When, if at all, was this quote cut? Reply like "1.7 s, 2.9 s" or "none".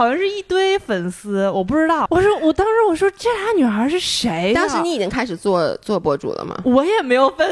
2.1 s

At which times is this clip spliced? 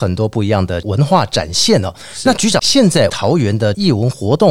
2.6 s

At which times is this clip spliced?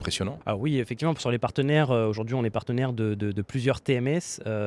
none

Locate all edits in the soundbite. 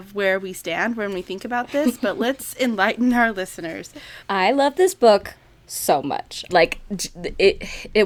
4.2 s, 6.5 s

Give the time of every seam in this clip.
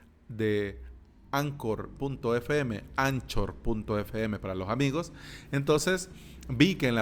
none

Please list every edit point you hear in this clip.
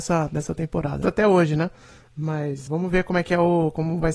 1.0 s, 2.7 s

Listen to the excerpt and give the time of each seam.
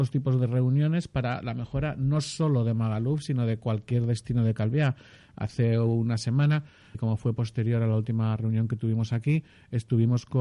6.9 s

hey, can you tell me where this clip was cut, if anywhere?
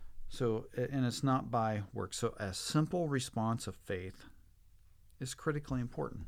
none

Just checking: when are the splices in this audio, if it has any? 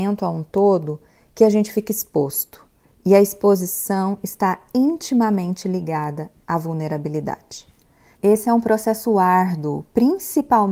8.1 s

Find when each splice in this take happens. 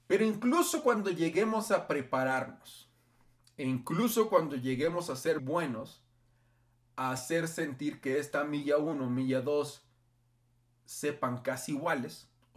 5.4 s

